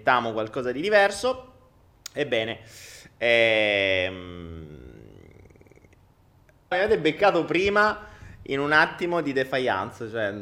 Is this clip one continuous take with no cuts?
no; 1 cut; at 6.7 s

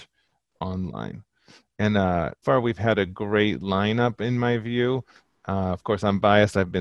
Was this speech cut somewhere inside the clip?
yes; 1 cut; at 2.4 s

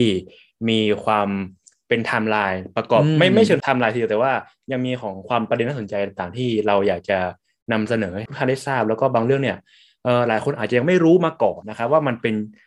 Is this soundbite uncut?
no; 1 cut; at 11.6 s

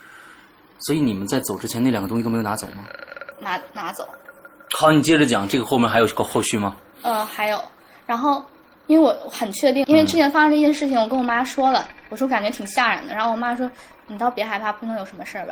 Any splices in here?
yes; 2 cuts; at 3.3 s, 9.8 s

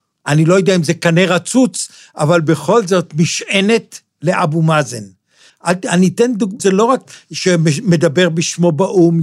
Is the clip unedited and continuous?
no; 2 cuts; at 5.5 s, 6.6 s

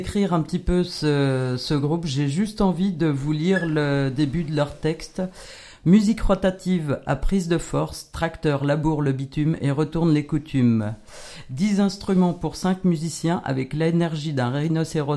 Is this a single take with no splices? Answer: yes; 0 cuts

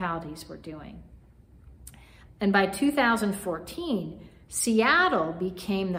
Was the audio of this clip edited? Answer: yes; 1 cut; at 2.3 s

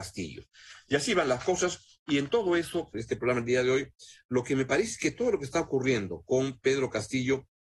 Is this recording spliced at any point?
yes; 1 cut; at 2.9 s

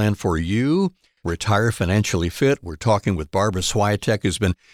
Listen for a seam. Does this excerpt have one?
yes; 1 cut; at 1.2 s

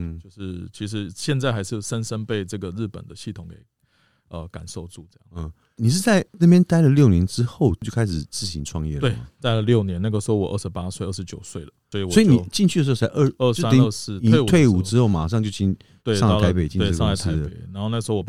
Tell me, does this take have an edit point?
no; 0 cuts

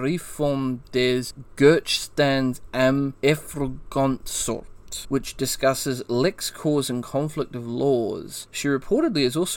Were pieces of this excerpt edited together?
no; 0 cuts

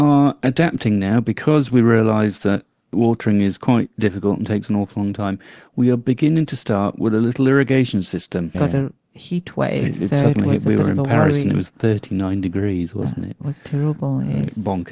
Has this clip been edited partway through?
yes; 1 cut; at 8.5 s

